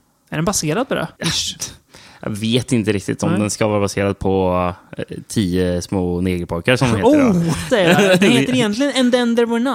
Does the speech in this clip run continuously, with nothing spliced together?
no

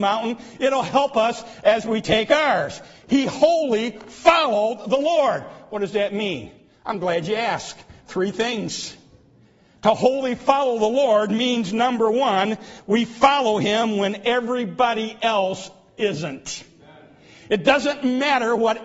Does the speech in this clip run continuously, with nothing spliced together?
yes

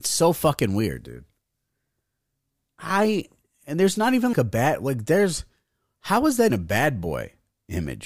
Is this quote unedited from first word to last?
no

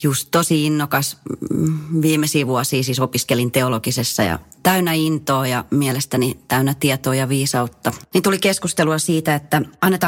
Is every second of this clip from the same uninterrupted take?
yes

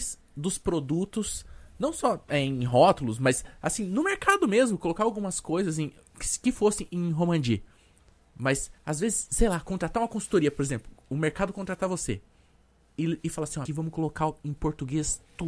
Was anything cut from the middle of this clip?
yes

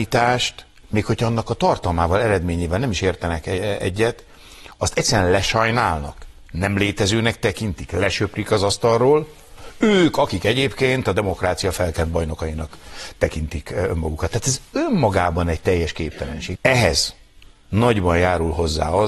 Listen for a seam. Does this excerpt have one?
yes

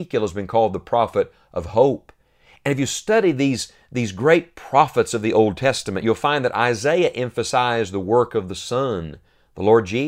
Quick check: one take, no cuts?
yes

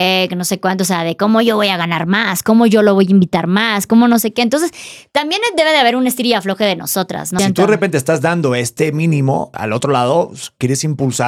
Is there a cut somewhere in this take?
yes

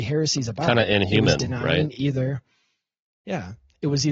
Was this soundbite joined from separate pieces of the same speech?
no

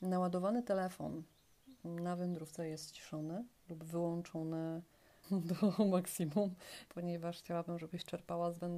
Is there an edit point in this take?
yes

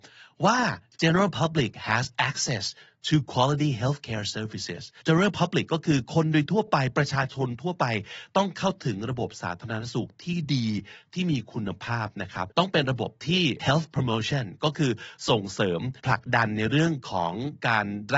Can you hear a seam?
no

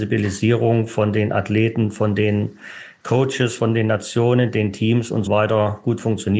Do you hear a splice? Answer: yes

